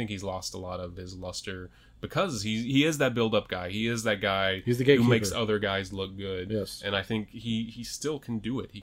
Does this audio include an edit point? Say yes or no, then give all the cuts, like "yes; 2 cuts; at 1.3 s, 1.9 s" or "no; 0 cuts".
no; 0 cuts